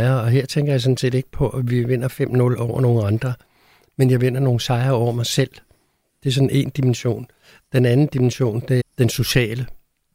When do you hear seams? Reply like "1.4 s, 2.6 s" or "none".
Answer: 8.8 s

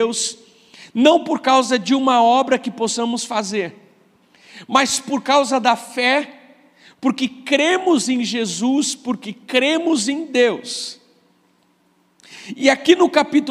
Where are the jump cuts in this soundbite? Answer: none

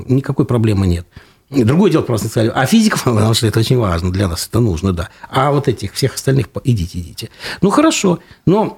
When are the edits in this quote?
3.0 s

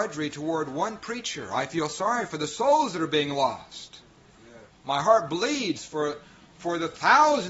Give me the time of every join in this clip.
none

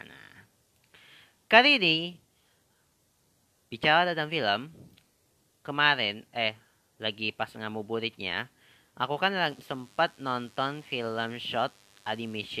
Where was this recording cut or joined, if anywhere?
6.9 s

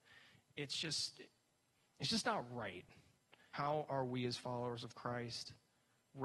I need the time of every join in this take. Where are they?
3.5 s

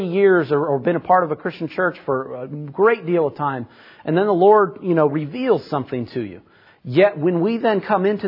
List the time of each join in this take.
6.7 s

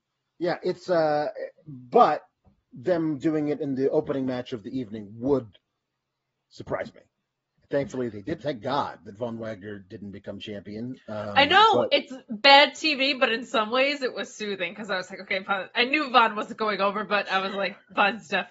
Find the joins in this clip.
8.4 s

